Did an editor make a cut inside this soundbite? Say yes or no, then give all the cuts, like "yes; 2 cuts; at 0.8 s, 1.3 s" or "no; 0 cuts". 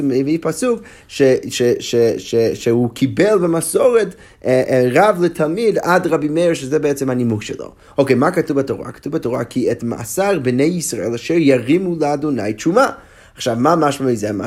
no; 0 cuts